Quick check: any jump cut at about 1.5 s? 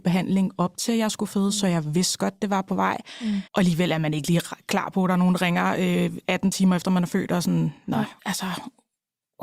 no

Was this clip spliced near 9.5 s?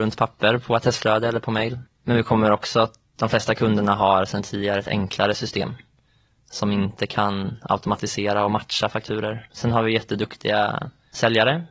yes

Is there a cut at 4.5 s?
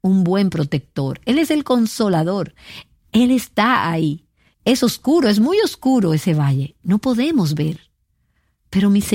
yes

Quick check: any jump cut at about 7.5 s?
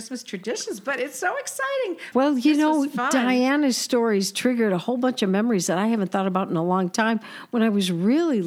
no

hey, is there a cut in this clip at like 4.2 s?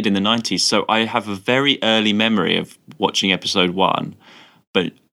no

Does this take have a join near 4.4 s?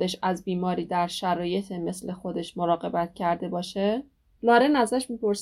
yes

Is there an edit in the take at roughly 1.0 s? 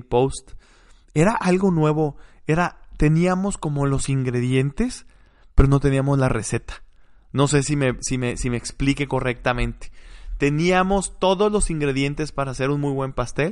no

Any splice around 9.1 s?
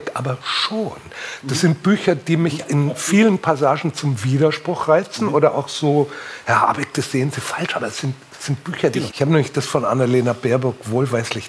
yes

